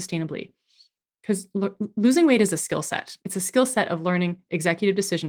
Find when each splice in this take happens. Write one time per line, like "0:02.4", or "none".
0:03.2